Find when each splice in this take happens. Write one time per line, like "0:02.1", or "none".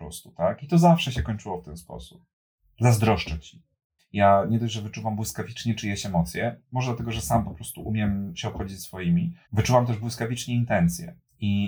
0:04.0
0:09.4